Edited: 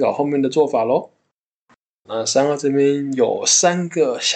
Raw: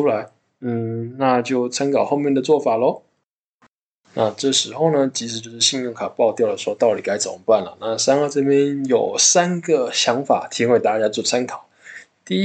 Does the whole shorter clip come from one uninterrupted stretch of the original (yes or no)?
no